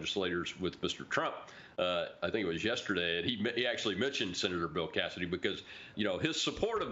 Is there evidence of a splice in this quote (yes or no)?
yes